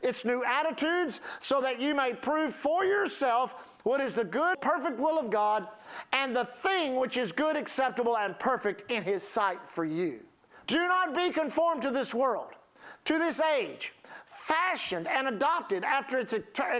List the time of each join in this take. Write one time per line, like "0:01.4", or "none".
0:04.5
0:10.6

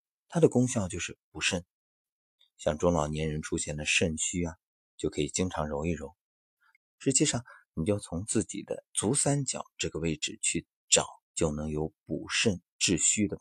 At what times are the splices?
0:06.8
0:08.9
0:11.2

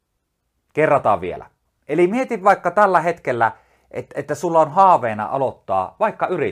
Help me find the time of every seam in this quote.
0:01.6

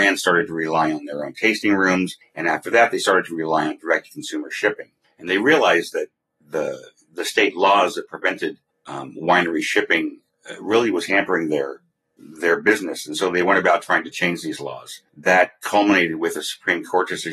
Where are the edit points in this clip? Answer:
none

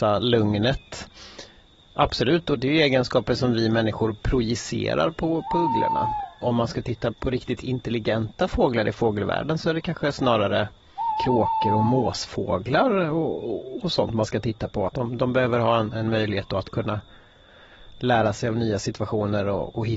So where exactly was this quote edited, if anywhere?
0:14.9

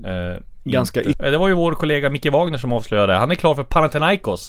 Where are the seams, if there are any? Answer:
0:01.1

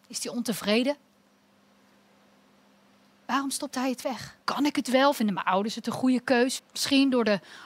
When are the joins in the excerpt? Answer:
0:04.4
0:06.6

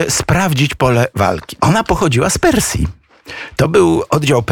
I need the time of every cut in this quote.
0:01.6

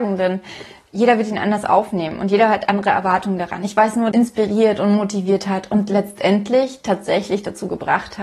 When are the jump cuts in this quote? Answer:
0:04.1

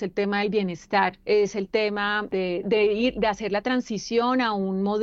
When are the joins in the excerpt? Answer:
0:02.6

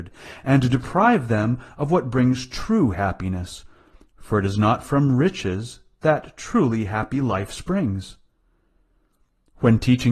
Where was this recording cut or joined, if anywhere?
none

